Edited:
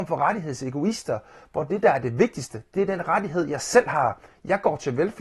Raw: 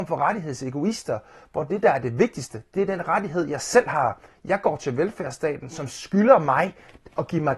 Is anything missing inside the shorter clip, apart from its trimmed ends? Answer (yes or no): no